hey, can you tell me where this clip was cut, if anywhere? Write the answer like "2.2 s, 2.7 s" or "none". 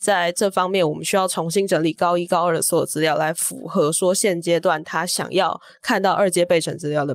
none